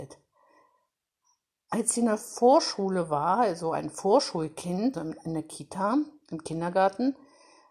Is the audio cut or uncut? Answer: cut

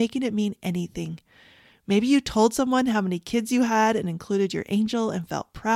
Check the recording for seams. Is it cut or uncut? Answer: uncut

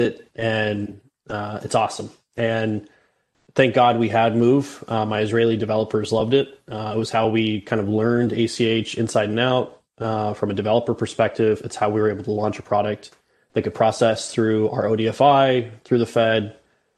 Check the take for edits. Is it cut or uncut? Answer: uncut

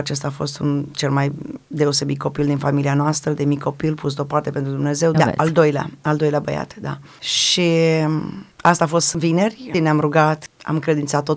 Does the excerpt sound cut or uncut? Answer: cut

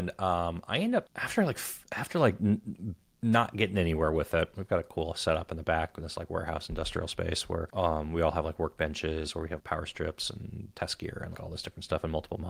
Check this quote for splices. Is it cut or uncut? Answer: cut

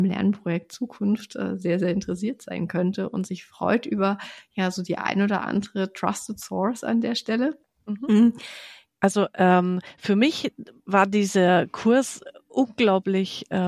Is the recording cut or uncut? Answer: cut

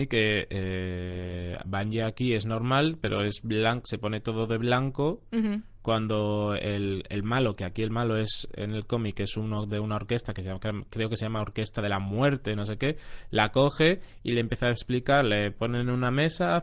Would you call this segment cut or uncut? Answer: uncut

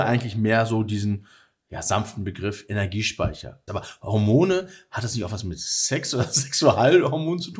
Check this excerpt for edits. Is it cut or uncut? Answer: cut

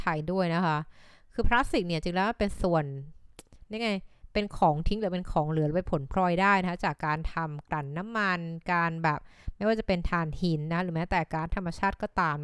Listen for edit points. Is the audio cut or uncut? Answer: cut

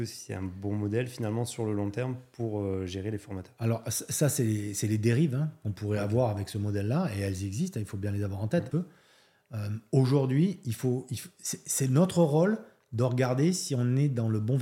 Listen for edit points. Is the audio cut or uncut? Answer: cut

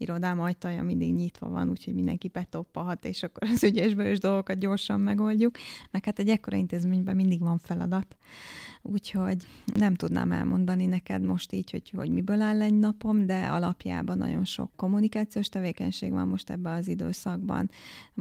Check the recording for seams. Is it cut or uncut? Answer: uncut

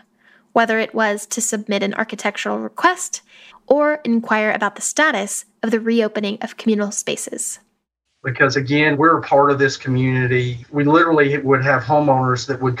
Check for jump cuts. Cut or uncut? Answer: cut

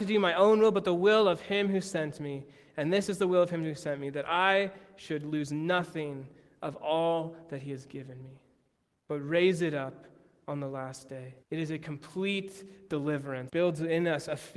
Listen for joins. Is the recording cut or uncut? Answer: cut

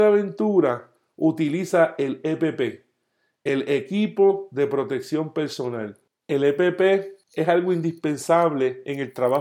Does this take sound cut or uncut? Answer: uncut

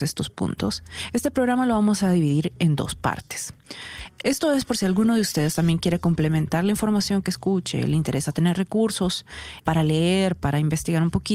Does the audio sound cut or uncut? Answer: cut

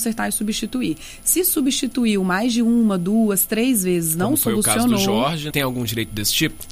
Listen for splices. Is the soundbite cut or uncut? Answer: cut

